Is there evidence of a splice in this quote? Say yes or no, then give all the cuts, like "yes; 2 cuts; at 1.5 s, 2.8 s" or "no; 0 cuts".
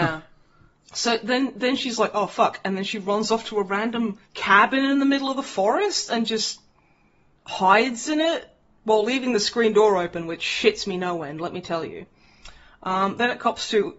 yes; 1 cut; at 4.2 s